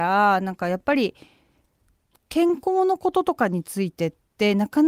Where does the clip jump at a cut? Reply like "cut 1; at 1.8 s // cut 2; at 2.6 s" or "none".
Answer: none

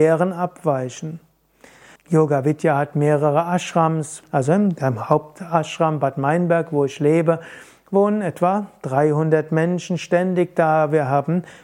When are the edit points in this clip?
cut 1; at 2.0 s // cut 2; at 4.2 s

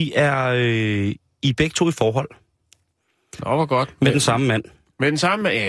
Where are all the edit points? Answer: none

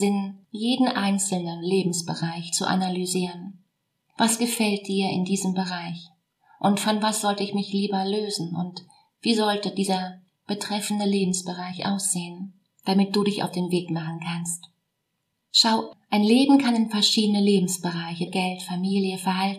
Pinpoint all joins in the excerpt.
cut 1; at 15.5 s // cut 2; at 18.3 s

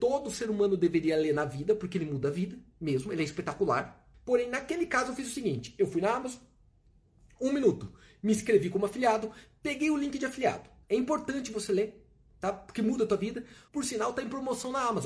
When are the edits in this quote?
cut 1; at 4.1 s // cut 2; at 10.8 s // cut 3; at 13.7 s

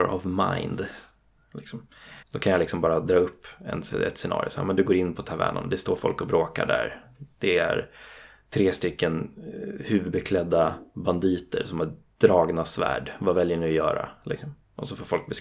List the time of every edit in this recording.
cut 1; at 2.2 s

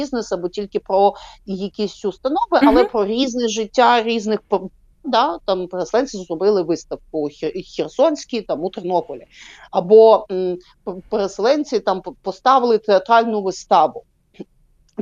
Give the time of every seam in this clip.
cut 1; at 5.0 s

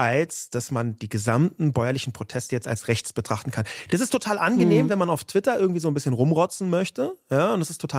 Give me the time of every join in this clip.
none

